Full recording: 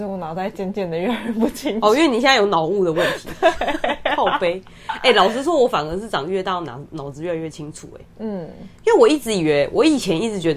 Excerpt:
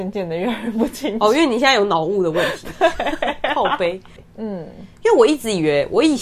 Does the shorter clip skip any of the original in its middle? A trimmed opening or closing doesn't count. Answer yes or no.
yes